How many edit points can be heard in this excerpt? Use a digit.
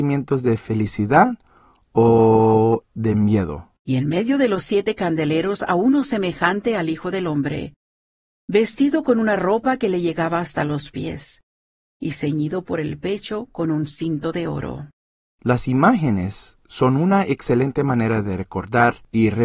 2